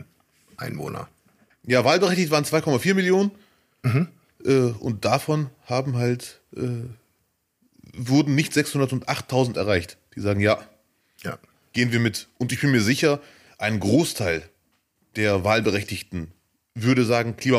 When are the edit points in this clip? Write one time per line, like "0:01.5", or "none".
none